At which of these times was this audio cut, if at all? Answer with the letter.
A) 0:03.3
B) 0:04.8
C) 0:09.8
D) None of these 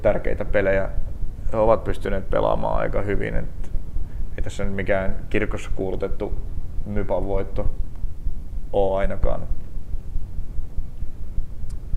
D